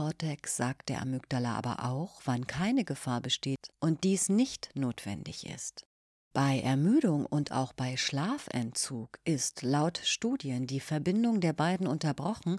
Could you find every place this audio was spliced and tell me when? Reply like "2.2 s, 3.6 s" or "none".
none